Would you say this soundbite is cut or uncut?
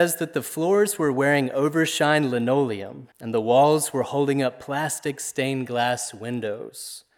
cut